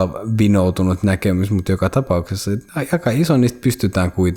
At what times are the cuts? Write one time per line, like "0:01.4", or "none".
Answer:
none